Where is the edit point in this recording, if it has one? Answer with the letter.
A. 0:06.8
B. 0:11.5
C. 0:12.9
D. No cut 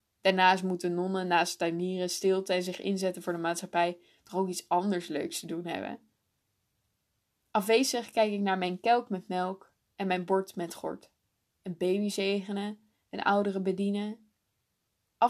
B